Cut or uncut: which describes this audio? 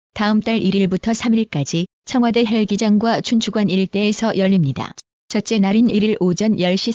uncut